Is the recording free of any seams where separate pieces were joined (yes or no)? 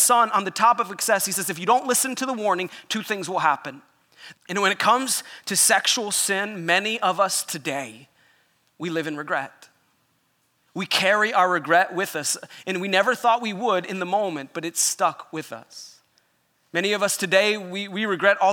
no